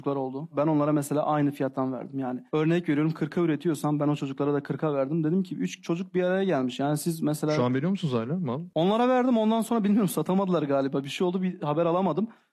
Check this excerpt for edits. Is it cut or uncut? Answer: uncut